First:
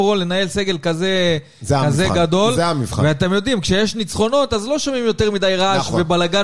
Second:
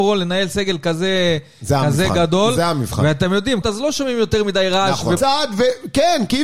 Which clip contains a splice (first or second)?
second